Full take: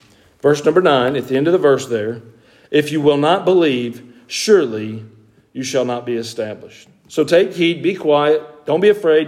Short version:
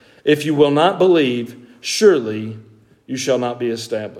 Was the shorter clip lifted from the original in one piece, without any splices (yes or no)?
yes